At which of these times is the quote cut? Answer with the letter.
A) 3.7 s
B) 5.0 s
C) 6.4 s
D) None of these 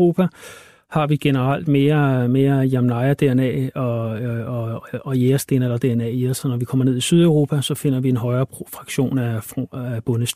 D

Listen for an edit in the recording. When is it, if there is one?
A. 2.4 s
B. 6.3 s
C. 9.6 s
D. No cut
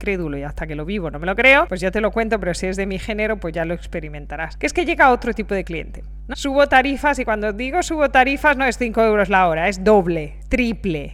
B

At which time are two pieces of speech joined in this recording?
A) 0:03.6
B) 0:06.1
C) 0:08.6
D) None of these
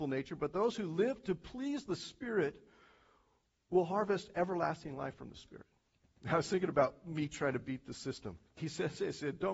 C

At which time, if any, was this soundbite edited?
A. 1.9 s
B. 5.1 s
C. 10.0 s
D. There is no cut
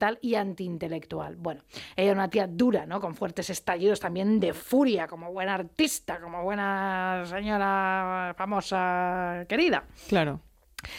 D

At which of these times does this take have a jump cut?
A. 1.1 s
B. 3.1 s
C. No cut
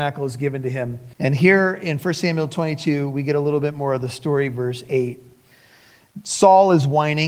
A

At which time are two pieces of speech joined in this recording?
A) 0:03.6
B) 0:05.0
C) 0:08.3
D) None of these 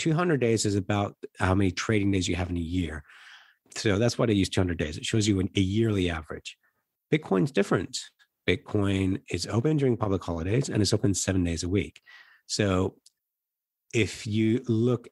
A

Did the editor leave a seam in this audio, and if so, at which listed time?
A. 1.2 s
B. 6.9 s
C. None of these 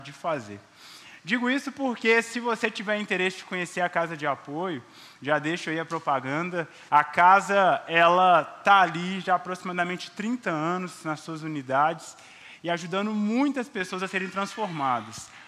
B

